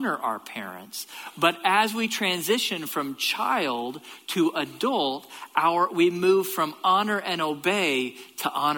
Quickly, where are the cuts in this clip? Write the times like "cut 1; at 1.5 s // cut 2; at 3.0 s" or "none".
none